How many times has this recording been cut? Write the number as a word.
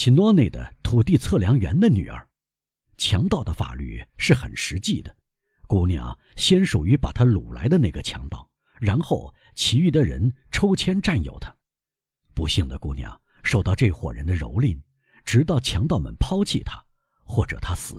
zero